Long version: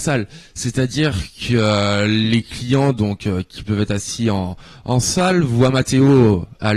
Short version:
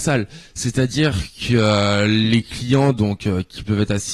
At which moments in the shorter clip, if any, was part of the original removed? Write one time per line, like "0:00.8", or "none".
none